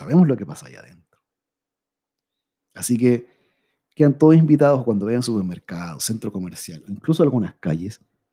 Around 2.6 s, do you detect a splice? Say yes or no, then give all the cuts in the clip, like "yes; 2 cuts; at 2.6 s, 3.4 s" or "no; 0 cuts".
yes; 1 cut; at 2.6 s